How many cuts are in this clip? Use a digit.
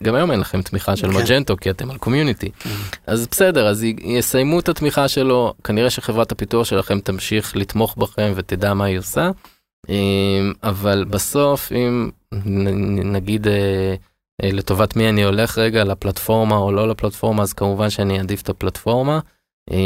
0